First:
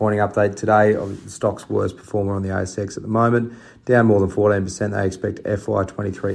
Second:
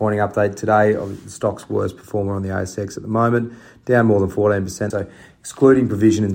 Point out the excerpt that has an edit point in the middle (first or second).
second